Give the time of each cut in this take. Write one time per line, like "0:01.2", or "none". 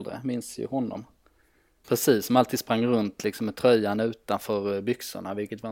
0:01.8